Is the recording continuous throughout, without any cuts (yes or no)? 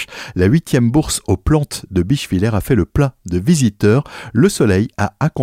yes